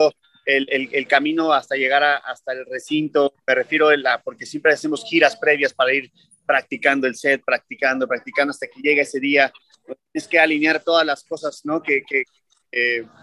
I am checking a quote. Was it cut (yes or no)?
no